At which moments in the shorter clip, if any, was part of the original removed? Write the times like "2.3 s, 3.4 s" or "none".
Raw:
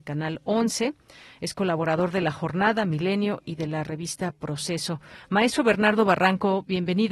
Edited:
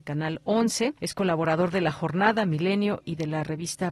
1.0 s

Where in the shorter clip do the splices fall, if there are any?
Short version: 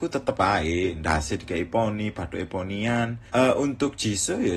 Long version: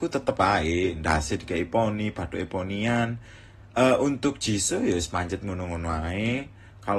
3.3 s

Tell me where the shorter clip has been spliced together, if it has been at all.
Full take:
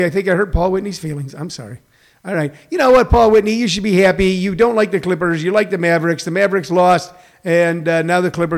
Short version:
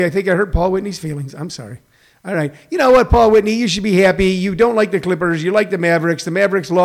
none

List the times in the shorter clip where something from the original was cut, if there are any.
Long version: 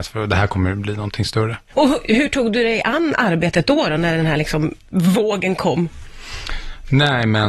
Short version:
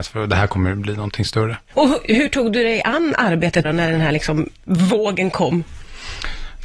3.6 s

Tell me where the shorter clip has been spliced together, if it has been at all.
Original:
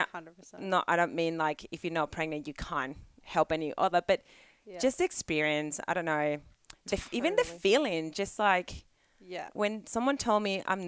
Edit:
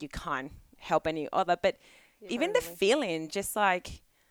2.3 s

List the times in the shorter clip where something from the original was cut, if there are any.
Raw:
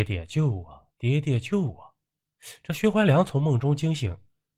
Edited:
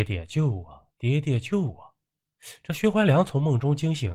none

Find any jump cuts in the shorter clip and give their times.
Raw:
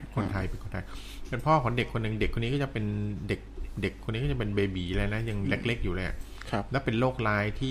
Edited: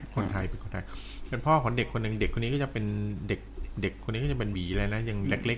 4.5 s

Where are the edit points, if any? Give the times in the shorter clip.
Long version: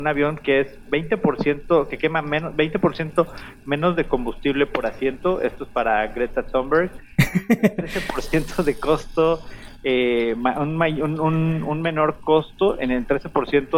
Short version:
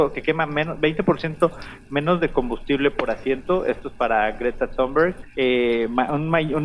5.3 s

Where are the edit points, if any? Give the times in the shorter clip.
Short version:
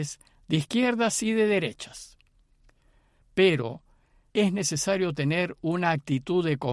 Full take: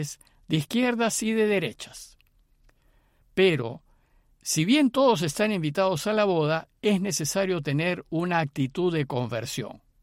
4.3 s

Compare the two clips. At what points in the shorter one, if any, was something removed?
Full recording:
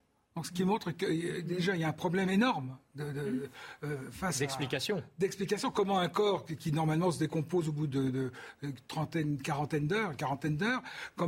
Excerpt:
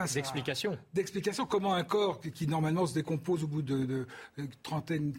none

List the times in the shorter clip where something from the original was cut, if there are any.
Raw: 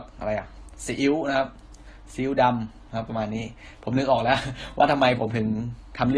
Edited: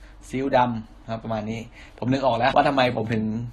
2.5 s

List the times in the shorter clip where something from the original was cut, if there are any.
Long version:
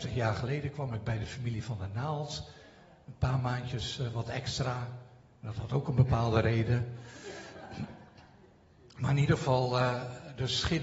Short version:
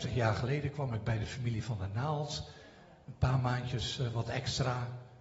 none

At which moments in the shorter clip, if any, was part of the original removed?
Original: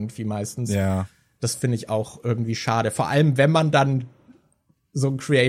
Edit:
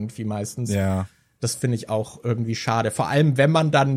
none

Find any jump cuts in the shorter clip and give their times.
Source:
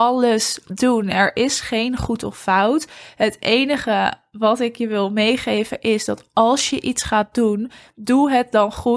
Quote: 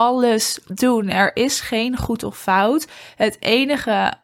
none

